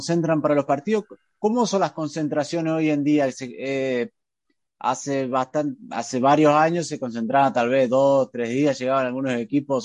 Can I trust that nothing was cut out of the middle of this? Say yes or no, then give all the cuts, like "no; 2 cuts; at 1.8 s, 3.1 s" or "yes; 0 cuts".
yes; 0 cuts